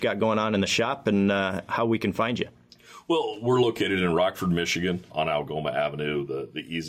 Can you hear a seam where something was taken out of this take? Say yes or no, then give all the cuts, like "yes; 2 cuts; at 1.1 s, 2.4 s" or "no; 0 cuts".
yes; 1 cut; at 5.1 s